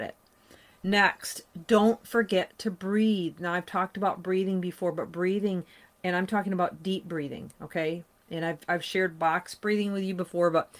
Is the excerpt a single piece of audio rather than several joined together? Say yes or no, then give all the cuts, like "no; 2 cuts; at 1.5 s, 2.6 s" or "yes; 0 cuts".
yes; 0 cuts